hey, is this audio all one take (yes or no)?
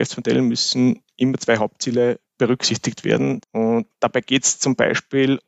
no